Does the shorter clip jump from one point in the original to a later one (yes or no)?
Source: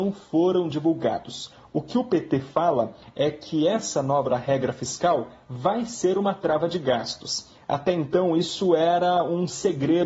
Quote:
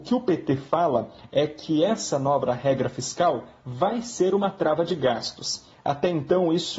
no